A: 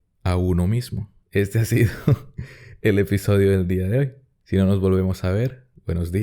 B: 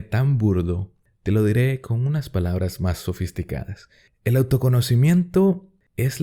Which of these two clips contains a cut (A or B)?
A